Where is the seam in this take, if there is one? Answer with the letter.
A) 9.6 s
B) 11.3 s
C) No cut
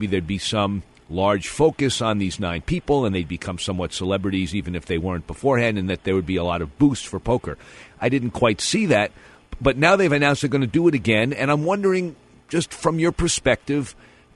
C